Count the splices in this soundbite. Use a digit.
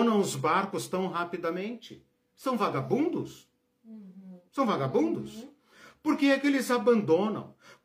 1